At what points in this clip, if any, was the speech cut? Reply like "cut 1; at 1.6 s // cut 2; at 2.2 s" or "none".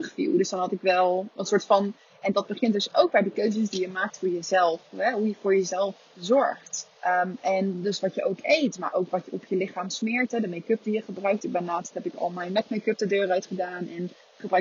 cut 1; at 2.1 s // cut 2; at 7.0 s